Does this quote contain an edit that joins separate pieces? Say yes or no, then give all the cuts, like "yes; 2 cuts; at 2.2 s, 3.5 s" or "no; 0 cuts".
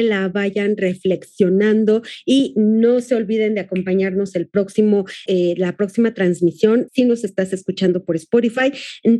yes; 2 cuts; at 5.3 s, 6.9 s